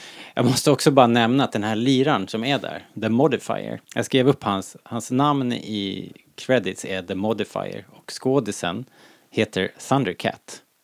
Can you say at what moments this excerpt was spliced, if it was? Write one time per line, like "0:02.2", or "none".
0:03.8